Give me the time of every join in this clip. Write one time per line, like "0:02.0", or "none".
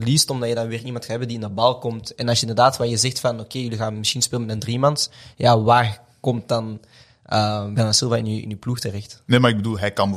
none

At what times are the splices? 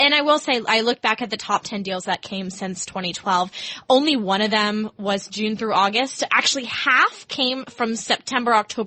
none

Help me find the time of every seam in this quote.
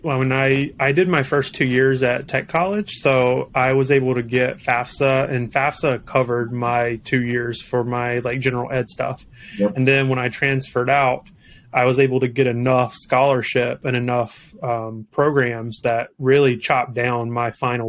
none

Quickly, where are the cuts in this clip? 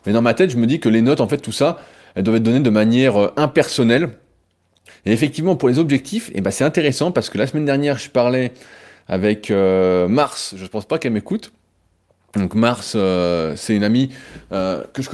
0:04.9

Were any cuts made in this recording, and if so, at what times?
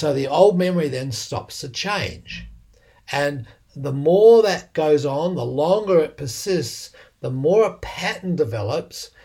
none

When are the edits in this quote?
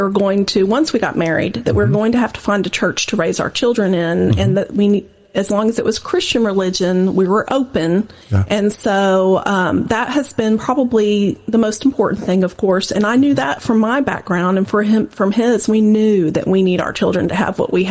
0:08.2

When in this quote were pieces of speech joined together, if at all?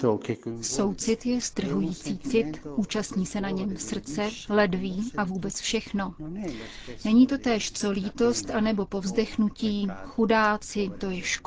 none

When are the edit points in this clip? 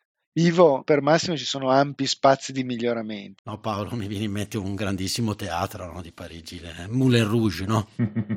0:03.4

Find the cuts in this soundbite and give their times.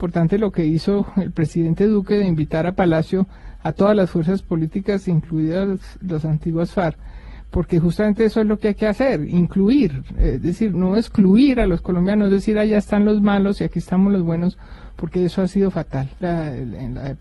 0:10.7
0:16.2

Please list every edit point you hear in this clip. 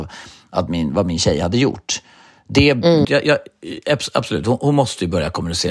0:03.0

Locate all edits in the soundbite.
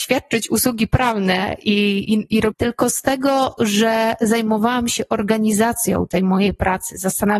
0:02.5

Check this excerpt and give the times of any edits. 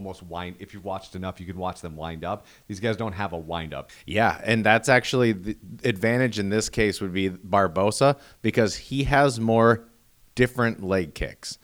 0:03.9

